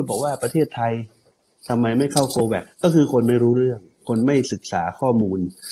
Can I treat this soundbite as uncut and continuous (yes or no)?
no